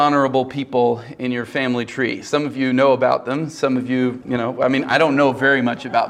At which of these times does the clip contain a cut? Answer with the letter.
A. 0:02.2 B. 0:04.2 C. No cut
B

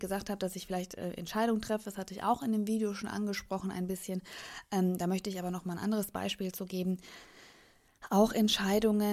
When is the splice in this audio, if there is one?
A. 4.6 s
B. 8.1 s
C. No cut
C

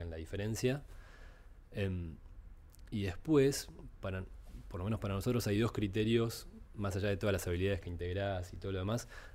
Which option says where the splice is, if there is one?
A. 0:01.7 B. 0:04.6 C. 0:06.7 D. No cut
D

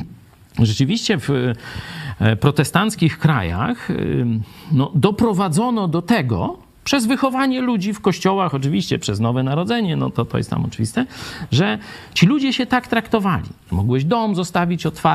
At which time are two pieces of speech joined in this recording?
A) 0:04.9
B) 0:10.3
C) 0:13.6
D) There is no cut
D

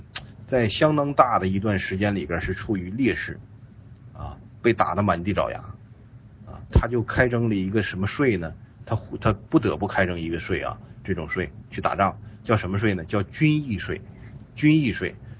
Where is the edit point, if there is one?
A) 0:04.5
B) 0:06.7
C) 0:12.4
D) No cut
B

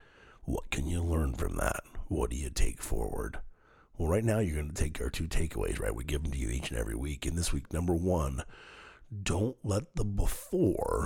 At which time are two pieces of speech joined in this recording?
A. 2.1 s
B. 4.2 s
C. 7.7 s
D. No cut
D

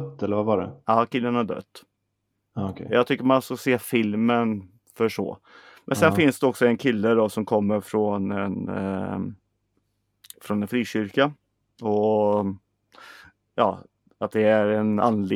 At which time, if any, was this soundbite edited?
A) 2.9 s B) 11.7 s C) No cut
C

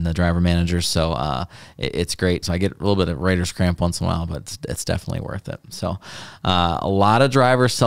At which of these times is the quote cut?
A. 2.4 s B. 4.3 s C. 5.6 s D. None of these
A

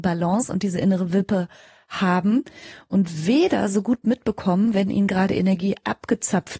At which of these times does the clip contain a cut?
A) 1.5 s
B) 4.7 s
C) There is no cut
C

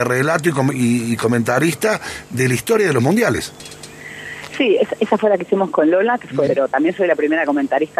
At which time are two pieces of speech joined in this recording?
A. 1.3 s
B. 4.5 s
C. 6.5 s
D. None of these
C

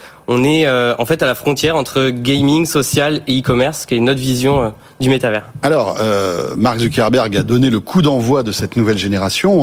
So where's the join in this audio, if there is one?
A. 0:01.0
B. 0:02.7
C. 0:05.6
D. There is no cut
D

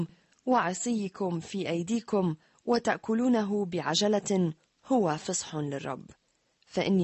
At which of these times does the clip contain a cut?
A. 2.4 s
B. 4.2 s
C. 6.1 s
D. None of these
D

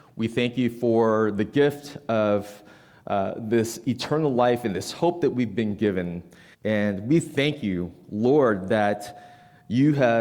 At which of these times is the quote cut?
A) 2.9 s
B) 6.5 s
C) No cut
B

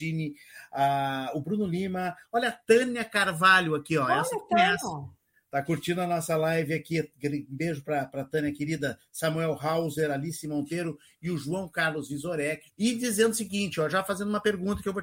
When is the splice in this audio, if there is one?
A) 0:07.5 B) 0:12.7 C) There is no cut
B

